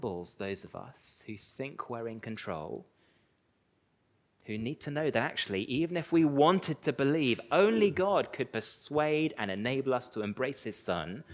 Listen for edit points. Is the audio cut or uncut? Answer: uncut